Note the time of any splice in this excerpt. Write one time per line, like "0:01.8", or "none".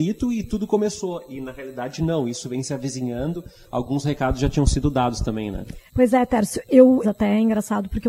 0:05.9
0:07.0